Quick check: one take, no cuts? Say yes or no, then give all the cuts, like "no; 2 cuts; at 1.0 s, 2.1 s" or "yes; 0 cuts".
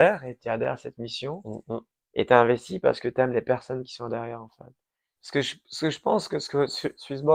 no; 1 cut; at 5.2 s